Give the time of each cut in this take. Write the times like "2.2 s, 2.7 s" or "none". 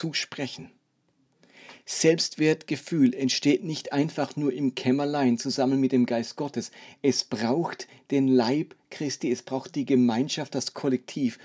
none